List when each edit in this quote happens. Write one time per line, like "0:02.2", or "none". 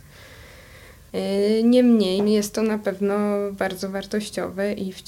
0:01.1
0:02.2

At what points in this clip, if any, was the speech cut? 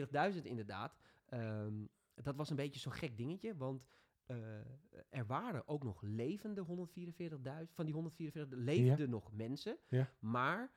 none

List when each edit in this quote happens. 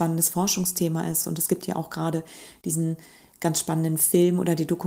none

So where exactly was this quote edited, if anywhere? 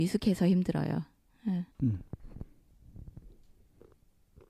0:01.7

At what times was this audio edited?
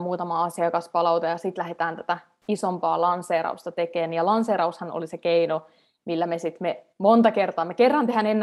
none

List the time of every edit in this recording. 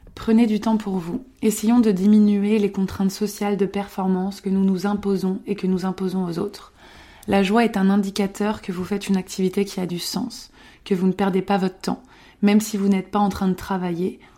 none

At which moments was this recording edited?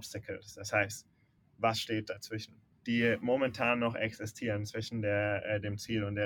0:01.4
0:02.7

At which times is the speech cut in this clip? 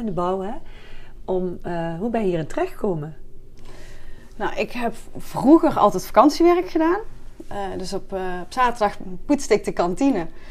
none

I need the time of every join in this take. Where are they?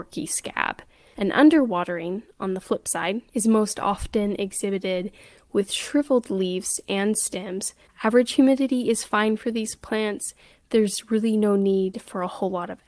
0:07.9

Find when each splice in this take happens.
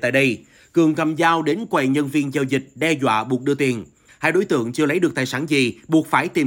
0:04.1

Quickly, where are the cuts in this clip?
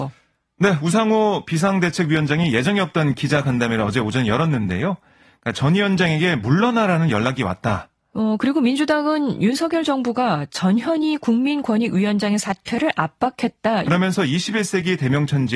0:08.1
0:13.9

